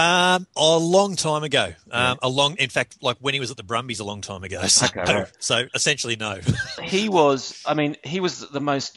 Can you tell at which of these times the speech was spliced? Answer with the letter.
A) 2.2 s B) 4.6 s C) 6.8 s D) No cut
C